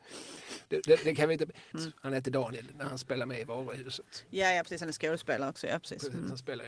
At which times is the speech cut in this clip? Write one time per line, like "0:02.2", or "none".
0:01.7